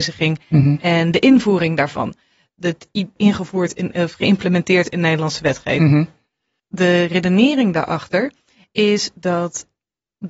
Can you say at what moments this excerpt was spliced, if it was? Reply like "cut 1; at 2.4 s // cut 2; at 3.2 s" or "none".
cut 1; at 3.2 s